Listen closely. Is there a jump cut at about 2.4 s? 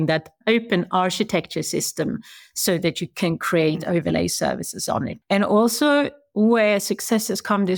no; 1 cut; at 5.2 s

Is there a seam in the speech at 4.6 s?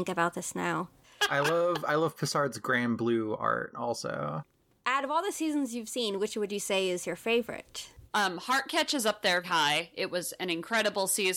no; 3 cuts; at 1.0 s, 8.1 s, 9.4 s

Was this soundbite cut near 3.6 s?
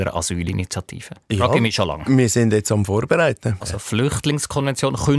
yes; 2 cuts; at 1.2 s, 3.6 s

